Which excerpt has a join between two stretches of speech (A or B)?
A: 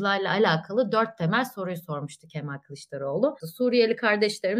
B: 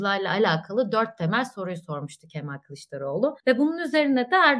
A